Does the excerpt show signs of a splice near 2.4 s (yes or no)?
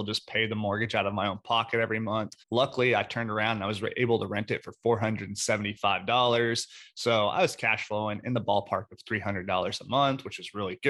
yes